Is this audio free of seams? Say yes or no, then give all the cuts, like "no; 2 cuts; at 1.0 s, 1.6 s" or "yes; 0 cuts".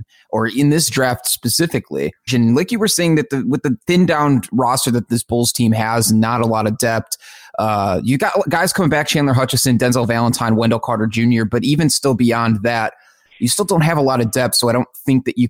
no; 1 cut; at 2.3 s